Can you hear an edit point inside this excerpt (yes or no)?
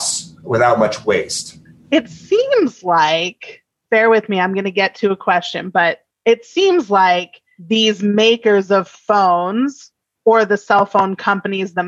no